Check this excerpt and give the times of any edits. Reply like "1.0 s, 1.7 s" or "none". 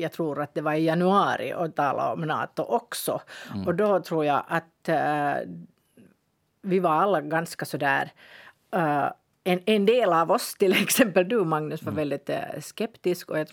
none